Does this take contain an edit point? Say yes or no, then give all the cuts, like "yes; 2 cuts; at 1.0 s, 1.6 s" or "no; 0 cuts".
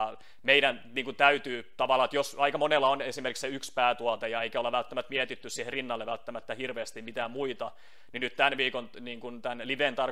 no; 0 cuts